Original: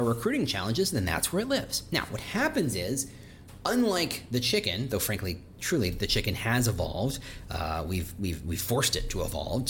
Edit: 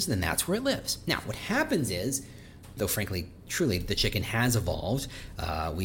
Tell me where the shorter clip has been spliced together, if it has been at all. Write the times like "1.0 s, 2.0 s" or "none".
2.8 s